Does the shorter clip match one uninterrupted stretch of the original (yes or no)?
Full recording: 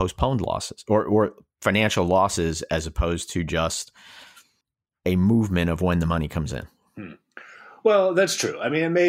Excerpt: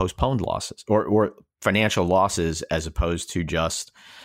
yes